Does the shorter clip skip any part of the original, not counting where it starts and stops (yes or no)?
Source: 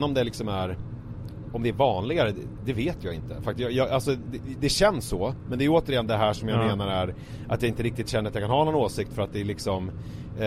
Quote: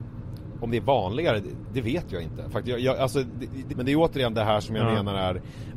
yes